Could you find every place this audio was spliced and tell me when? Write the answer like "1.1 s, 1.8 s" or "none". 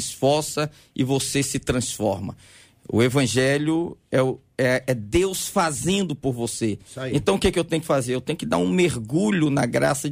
none